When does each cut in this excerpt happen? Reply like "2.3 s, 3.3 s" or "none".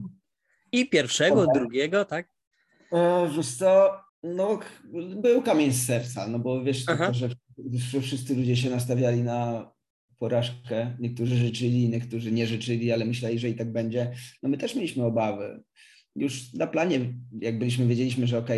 4.1 s